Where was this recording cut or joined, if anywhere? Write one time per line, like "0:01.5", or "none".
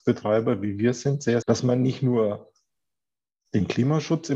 0:01.4

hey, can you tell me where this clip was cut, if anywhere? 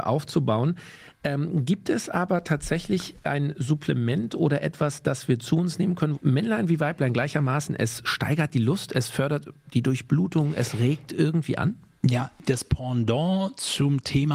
0:06.1

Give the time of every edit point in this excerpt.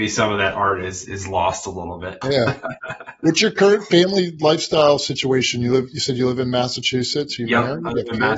0:01.1
0:02.2

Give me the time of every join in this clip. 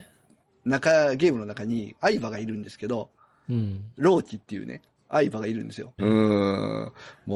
0:02.0
0:06.0

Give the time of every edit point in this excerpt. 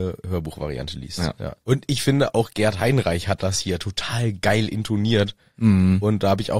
0:01.6

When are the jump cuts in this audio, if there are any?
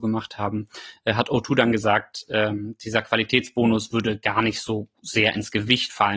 none

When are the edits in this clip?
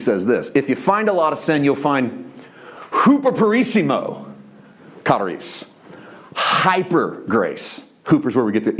none

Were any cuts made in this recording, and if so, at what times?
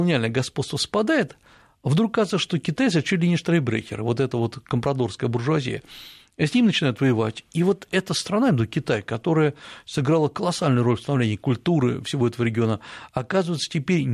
none

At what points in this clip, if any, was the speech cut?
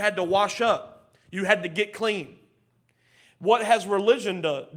none

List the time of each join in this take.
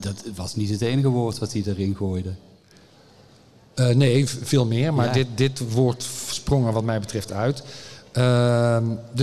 none

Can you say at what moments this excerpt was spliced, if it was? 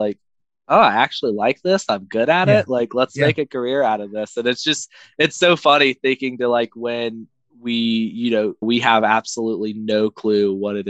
0:08.6

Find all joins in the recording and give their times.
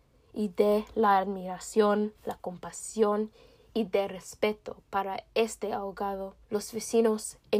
0:06.4

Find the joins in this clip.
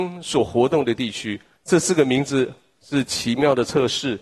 0:01.6

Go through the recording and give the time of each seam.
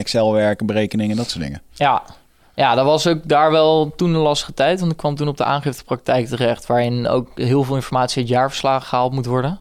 none

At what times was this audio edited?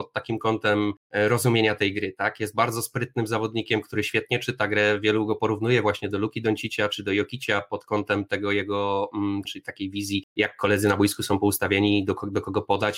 0:09.4

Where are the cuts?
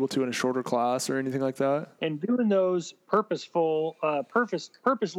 0:02.0

